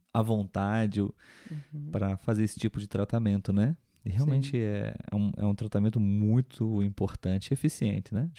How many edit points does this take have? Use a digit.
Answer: 0